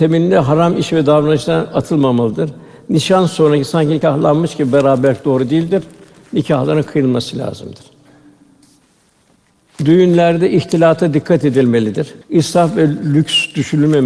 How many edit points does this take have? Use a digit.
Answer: 1